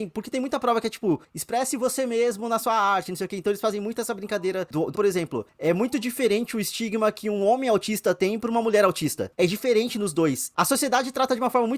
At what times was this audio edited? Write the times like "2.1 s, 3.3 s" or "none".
4.9 s, 9.3 s